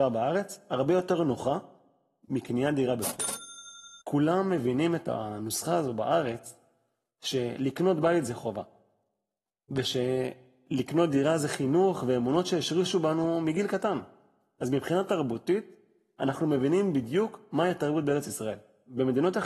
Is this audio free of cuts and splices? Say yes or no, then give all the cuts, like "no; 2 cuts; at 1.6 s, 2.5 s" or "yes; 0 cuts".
no; 1 cut; at 4.0 s